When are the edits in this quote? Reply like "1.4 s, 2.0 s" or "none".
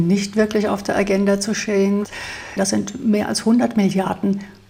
2.6 s